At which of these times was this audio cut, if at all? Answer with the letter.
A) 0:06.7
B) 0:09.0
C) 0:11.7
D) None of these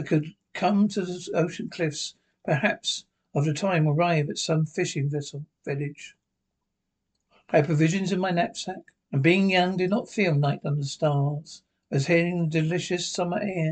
B